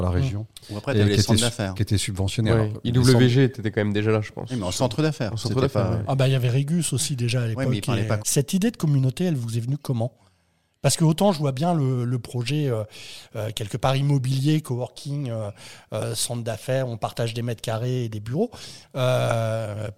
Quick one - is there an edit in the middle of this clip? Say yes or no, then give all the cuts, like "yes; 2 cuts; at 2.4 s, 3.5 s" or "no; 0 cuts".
yes; 2 cuts; at 8.2 s, 18.8 s